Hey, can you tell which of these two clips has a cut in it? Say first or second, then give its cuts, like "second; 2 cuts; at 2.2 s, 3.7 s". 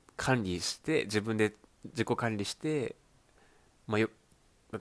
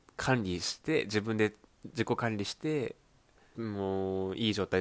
second; 1 cut; at 3.5 s